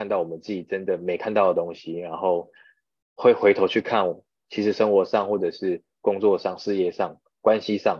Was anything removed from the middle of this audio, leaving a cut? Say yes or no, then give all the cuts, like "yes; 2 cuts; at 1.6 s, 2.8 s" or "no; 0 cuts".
no; 0 cuts